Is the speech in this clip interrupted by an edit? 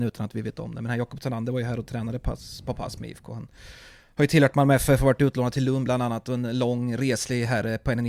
no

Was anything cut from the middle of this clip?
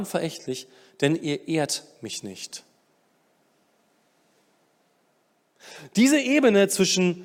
no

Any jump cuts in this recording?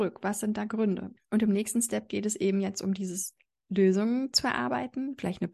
yes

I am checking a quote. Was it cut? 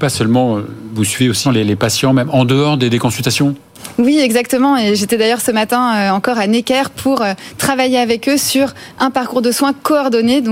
yes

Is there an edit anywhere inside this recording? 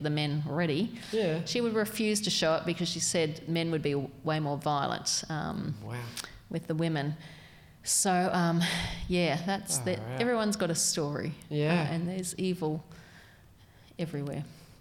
no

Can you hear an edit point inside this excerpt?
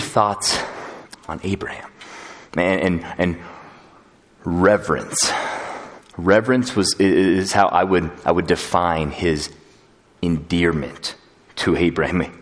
yes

